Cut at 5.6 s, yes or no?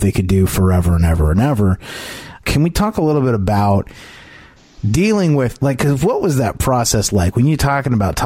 no